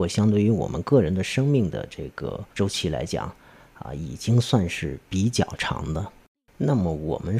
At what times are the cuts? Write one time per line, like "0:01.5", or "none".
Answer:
0:02.5
0:05.1